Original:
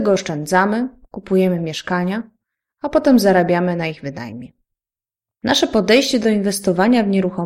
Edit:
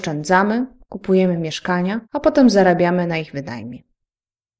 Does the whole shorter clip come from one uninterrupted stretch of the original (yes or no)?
no